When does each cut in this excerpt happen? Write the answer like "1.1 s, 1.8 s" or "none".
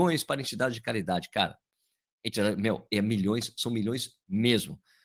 none